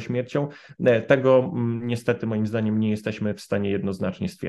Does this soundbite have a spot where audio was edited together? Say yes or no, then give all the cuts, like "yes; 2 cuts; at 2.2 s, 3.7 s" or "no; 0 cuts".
no; 0 cuts